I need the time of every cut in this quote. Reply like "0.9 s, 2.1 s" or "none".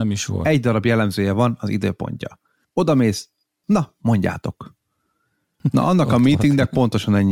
3.6 s, 5.6 s

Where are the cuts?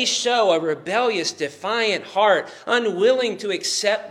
none

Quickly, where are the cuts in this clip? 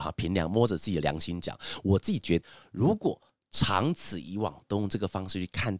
2.4 s

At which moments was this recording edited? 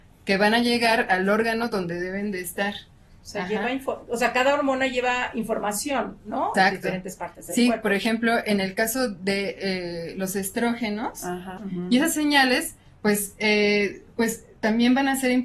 6.5 s, 11.6 s

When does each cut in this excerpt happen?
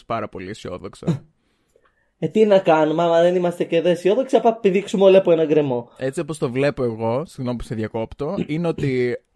none

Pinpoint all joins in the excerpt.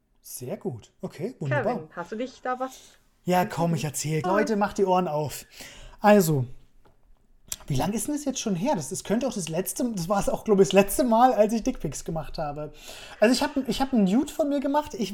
4.2 s

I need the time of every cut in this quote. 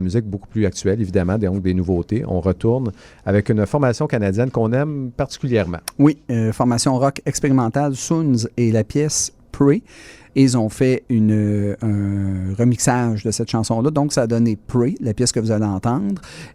10.3 s

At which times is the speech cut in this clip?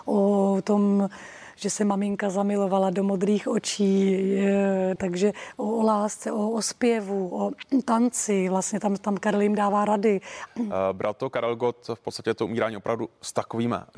5.0 s, 10.5 s

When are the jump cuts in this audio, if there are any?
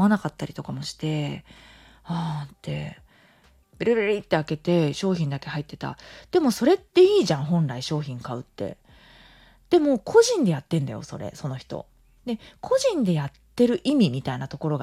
3.6 s

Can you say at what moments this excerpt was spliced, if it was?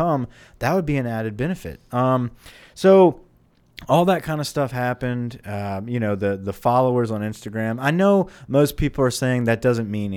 none

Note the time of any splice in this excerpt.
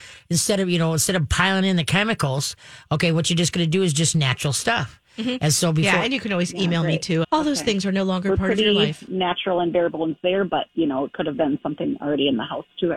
7.2 s

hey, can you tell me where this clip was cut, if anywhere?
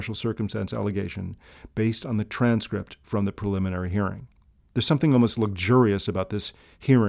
none

